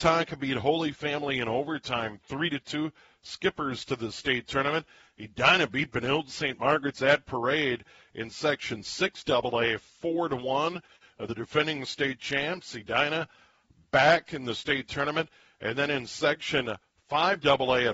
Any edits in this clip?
no; 0 cuts

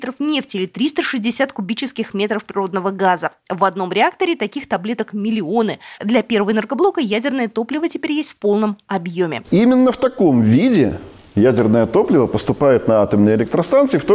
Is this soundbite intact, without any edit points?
no; 2 cuts; at 6.0 s, 9.4 s

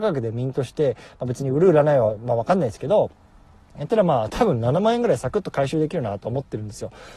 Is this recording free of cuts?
yes; 0 cuts

